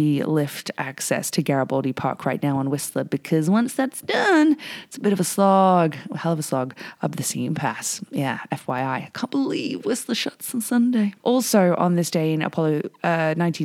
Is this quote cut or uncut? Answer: cut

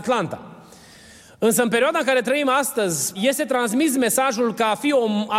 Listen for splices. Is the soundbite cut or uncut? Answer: cut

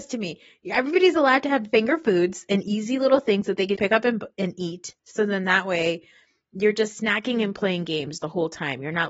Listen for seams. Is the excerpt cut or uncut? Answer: cut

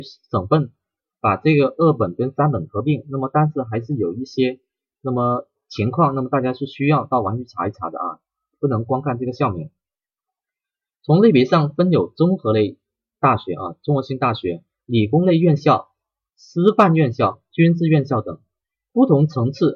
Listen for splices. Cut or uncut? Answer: uncut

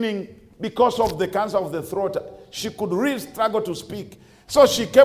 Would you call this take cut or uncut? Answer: uncut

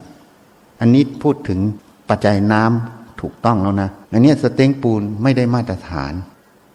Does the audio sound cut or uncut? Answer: cut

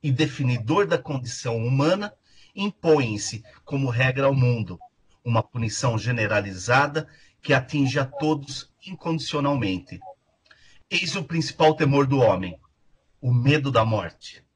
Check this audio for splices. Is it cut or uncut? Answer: uncut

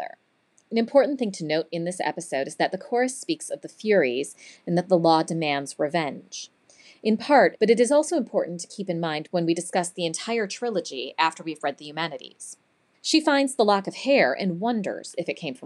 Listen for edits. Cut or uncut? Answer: cut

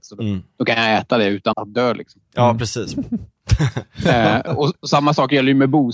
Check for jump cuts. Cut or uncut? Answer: cut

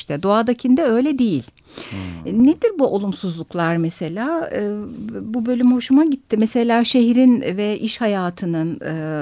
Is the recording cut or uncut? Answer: uncut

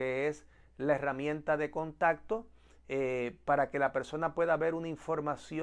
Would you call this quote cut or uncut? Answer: uncut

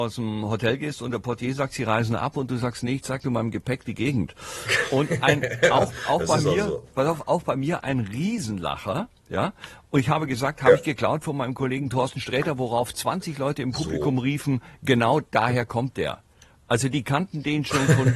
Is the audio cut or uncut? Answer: uncut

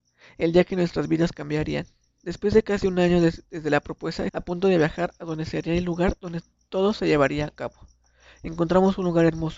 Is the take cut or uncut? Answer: cut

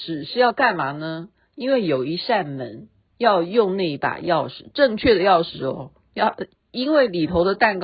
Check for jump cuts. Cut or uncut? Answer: uncut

